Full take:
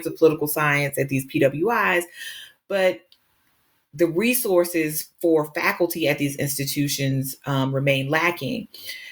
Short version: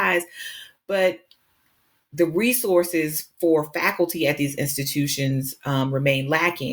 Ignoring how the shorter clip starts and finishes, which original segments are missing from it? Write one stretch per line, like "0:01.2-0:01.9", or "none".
none

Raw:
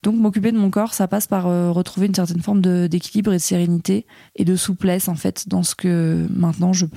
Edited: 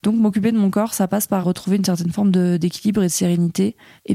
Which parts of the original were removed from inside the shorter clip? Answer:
0:01.4-0:01.7

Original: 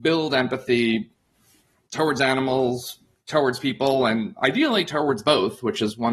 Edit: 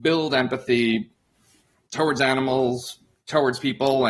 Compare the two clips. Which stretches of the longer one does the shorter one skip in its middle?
none

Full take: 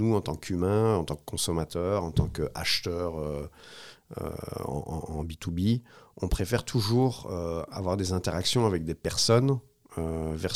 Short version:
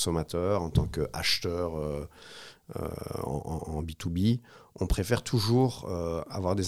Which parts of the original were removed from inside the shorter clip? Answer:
none

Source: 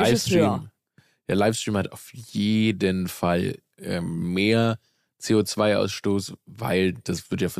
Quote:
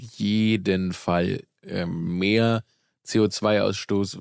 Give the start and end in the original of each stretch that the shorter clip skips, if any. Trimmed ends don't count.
none

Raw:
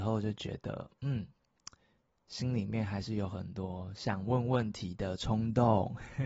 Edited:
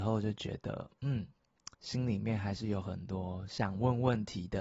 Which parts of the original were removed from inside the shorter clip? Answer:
0:01.7-0:02.2

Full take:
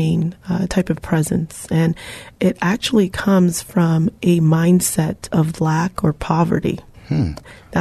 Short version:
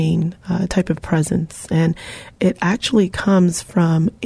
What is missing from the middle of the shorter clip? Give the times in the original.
none

